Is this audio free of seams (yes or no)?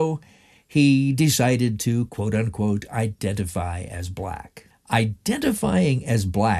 no